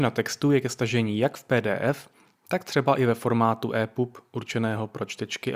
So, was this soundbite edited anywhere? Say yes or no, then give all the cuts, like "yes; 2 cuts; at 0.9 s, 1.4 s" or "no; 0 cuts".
no; 0 cuts